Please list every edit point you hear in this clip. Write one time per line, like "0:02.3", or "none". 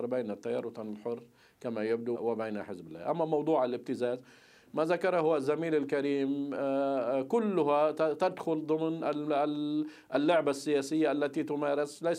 0:02.1

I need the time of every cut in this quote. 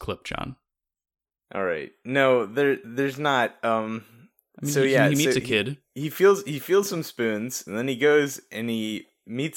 0:07.7

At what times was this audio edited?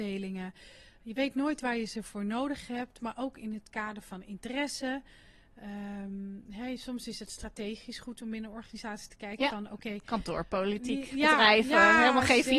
none

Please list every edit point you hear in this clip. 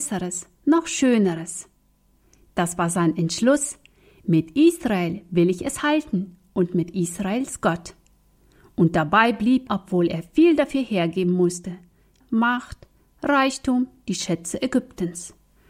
0:09.7
0:12.2

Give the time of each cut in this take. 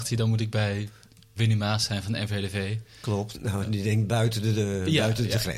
0:01.4
0:03.3

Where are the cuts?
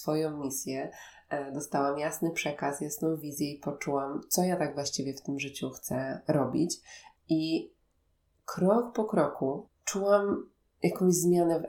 0:07.2
0:09.7

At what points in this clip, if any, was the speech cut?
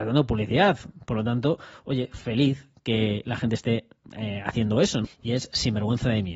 0:05.0

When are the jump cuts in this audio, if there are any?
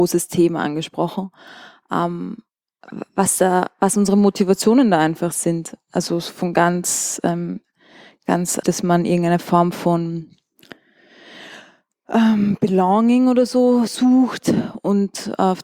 0:08.6

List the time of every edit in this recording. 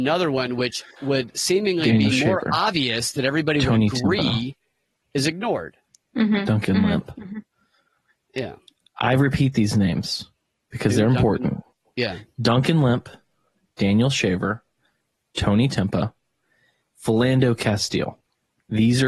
none

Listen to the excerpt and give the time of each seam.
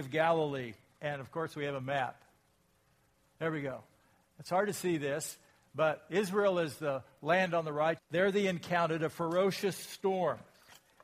0:08.0

